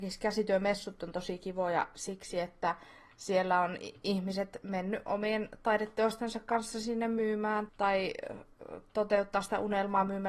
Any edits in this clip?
yes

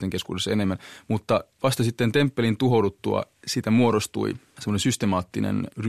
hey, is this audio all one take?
yes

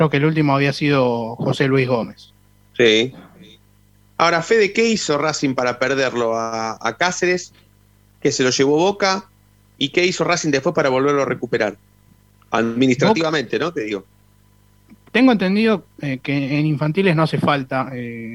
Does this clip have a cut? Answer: no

